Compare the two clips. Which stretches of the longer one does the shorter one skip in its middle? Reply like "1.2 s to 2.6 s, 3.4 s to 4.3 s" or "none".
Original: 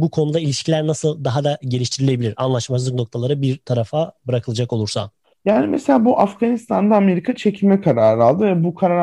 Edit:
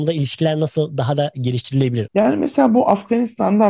2.3 s to 5.4 s